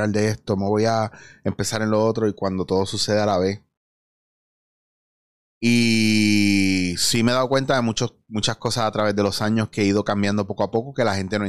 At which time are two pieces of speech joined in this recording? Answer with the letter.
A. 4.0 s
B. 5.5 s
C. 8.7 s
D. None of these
D